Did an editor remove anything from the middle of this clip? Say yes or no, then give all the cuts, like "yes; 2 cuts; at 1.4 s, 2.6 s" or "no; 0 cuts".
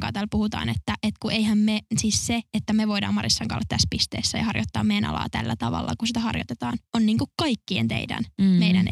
no; 0 cuts